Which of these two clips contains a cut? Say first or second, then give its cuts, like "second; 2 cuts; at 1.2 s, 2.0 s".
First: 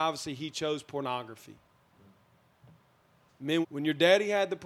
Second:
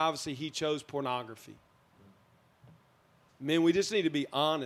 first; 1 cut; at 3.6 s